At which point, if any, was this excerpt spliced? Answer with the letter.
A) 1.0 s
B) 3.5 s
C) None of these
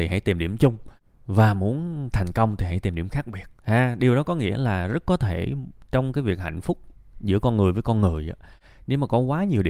B